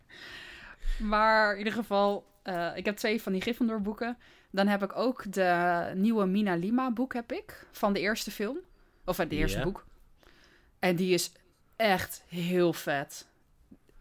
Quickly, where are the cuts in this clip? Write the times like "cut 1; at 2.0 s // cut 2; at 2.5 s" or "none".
none